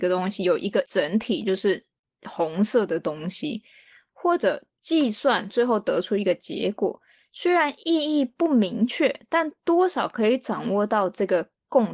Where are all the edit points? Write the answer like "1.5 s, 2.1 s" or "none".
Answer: none